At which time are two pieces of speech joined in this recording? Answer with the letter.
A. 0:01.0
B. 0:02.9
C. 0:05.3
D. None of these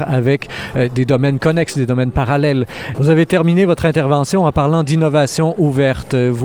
B